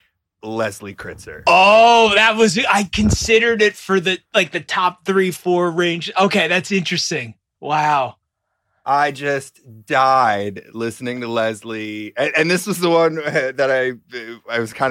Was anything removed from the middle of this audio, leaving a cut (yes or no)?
no